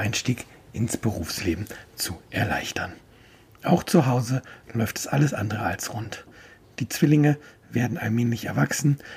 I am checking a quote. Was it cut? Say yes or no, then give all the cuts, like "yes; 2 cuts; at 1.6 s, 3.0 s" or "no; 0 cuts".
no; 0 cuts